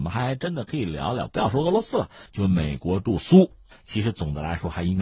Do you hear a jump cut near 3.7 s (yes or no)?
yes